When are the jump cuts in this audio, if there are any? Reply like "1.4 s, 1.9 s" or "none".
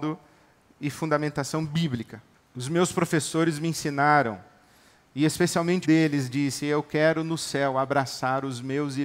2.3 s, 5.8 s